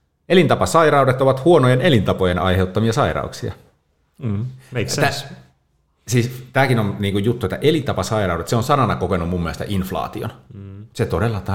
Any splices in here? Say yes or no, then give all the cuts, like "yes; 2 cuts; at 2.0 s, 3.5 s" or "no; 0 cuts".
no; 0 cuts